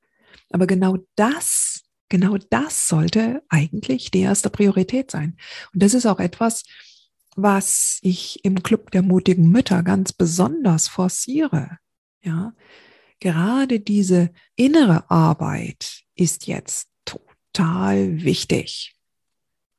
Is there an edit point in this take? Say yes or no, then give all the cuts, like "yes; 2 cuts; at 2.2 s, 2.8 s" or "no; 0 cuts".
no; 0 cuts